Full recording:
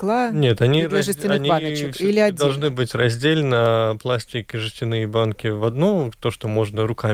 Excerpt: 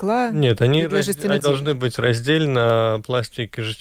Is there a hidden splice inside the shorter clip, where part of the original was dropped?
yes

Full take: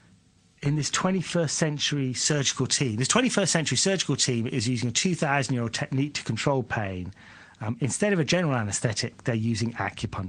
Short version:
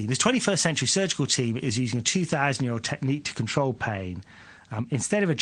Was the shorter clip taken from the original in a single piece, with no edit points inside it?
yes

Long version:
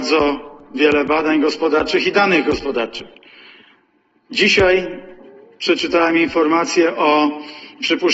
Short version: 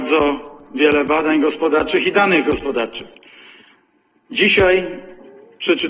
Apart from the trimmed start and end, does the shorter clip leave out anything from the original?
no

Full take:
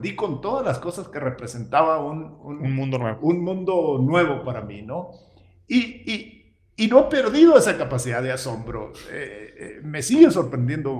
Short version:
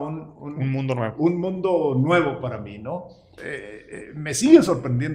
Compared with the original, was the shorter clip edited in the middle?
yes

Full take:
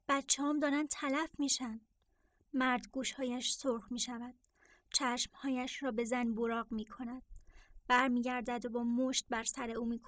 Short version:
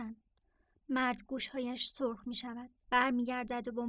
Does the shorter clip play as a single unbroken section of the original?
no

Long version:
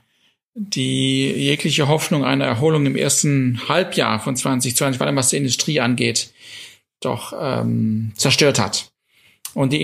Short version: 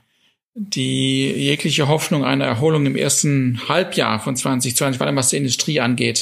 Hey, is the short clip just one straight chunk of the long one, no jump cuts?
yes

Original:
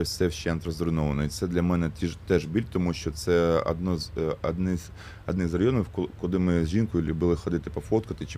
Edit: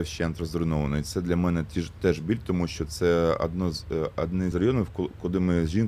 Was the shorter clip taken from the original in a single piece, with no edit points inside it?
no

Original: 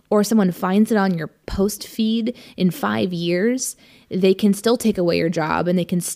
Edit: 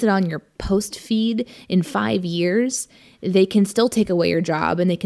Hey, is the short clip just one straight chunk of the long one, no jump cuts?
yes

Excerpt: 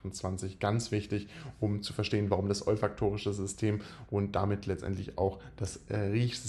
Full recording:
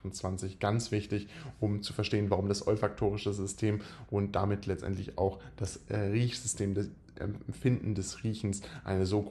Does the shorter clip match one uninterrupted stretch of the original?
yes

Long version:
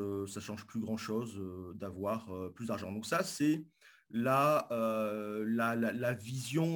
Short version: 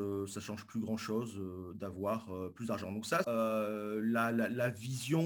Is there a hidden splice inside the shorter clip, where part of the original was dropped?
yes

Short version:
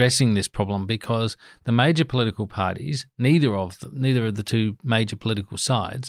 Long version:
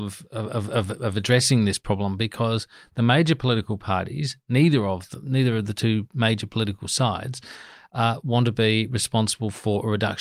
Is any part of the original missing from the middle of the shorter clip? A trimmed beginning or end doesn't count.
no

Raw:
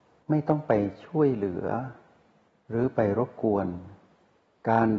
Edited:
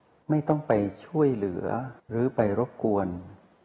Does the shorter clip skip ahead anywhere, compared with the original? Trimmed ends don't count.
yes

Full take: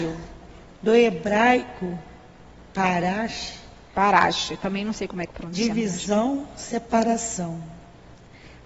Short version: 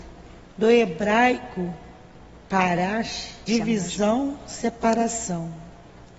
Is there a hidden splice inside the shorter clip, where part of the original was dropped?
yes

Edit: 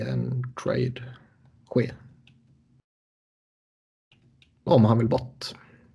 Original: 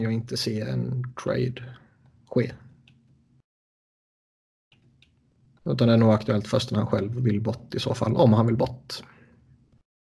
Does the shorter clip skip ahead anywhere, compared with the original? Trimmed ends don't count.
yes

